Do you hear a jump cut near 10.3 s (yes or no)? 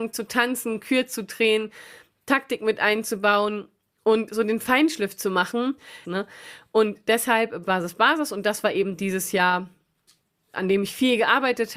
no